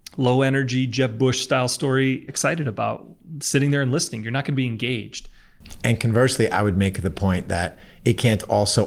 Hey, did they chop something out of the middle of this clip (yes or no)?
yes